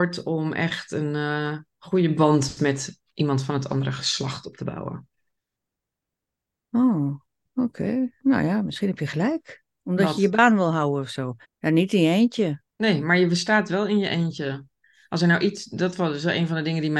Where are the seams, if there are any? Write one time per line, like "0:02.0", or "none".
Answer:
0:09.8
0:11.4
0:12.7